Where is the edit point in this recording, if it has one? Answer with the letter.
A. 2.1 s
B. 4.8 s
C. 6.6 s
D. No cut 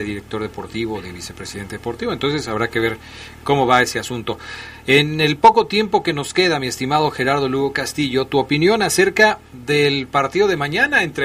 D